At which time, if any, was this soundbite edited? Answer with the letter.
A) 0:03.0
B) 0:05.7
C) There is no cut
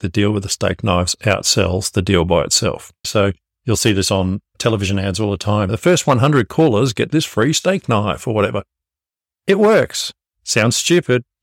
A